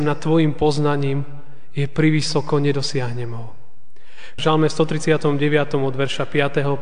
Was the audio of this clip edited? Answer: yes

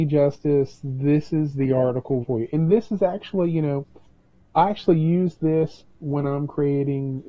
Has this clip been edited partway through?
yes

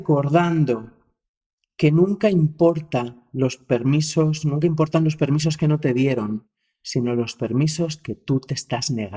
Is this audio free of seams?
yes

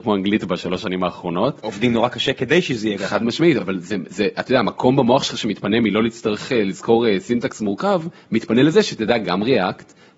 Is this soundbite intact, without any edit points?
yes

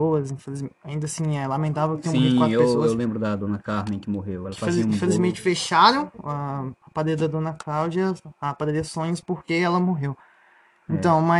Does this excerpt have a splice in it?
no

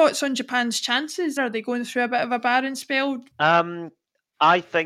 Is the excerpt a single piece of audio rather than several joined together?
no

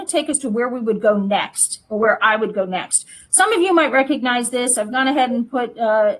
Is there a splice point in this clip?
no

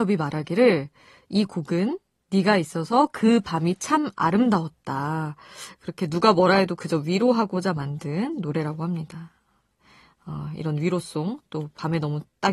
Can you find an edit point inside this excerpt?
no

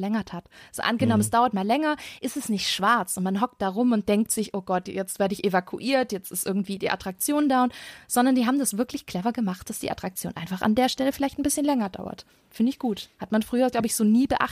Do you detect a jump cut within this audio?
no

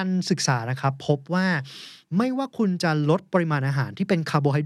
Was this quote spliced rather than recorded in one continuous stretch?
no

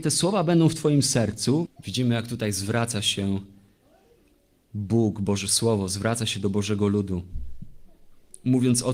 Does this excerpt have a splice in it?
yes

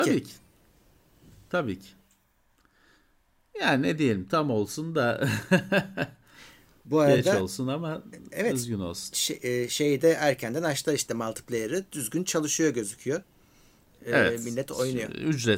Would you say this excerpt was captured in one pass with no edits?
yes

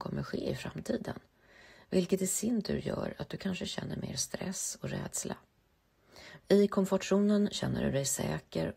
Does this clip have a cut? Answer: yes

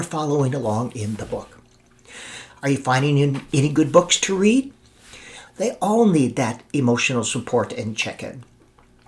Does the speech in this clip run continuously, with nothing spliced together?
no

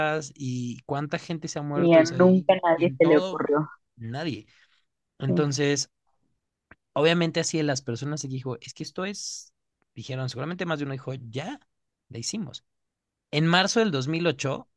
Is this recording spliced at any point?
no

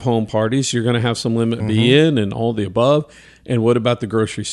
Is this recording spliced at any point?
yes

